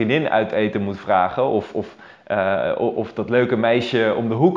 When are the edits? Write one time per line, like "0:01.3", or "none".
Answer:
none